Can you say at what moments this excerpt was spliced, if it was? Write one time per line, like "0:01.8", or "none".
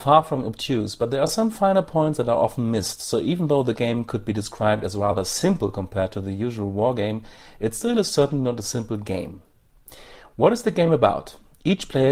none